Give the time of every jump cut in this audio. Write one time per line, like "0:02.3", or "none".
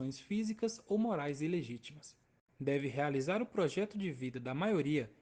0:02.5